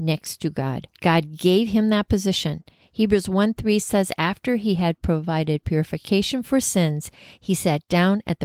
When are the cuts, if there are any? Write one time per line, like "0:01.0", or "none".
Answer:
none

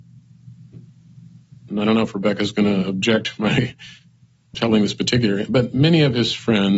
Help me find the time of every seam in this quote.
0:01.7
0:04.5

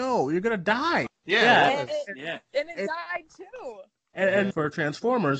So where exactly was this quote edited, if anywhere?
0:01.1
0:04.5

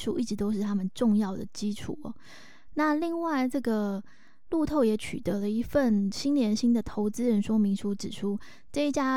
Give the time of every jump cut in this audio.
none

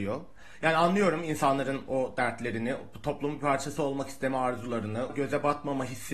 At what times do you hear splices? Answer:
0:05.1

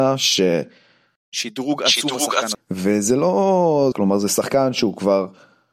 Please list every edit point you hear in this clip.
0:01.2
0:02.5
0:03.9

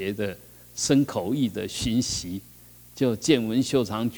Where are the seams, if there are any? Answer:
none

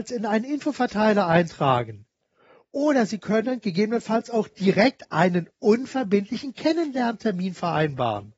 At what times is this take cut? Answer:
none

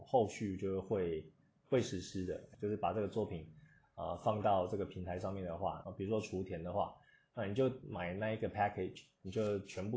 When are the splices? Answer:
0:02.5
0:05.8

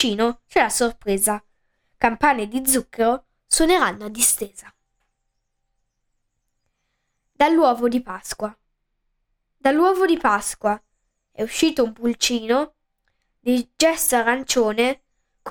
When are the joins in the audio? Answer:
none

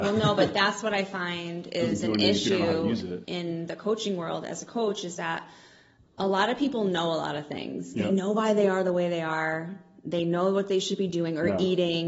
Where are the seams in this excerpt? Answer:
0:03.2

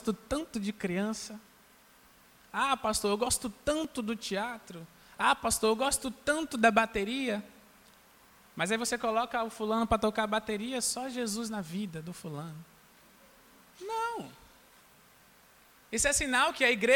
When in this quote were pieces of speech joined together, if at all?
0:13.6

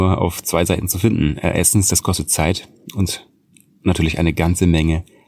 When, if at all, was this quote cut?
none

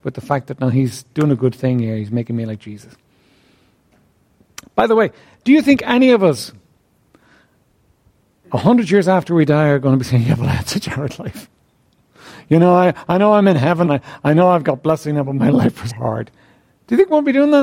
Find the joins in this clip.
0:13.9
0:15.9

